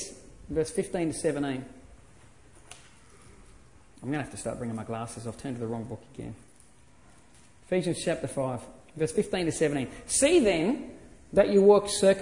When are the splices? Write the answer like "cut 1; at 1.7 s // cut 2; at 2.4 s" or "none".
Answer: none